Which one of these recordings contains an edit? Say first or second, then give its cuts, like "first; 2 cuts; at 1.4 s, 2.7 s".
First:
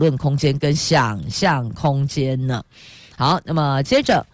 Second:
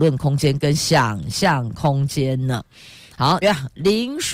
second; 1 cut; at 3.4 s